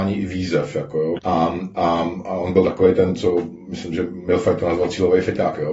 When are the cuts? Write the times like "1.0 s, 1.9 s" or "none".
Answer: 1.2 s